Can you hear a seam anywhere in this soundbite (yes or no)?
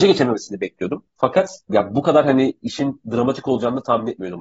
no